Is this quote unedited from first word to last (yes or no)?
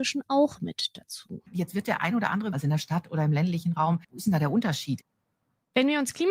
no